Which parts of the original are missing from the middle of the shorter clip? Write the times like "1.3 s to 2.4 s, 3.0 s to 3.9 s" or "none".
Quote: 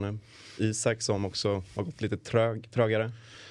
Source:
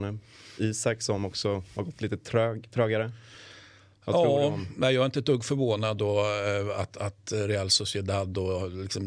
none